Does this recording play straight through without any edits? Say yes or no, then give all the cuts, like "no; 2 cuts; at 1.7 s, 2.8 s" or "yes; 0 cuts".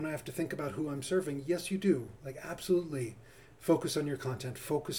yes; 0 cuts